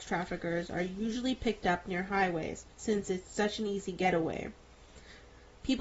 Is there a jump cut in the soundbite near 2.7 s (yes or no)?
yes